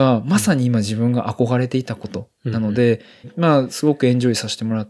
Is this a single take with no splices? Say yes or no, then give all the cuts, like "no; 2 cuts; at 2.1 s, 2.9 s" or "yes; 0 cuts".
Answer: no; 1 cut; at 3.2 s